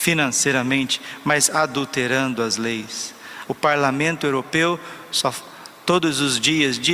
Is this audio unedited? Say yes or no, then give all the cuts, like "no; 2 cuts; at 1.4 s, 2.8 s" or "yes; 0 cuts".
no; 1 cut; at 3.5 s